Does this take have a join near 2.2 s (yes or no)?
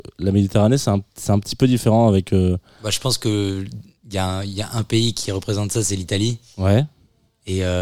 no